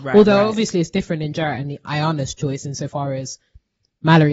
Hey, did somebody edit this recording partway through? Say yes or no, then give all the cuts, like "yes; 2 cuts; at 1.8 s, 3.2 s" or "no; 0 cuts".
yes; 1 cut; at 1.8 s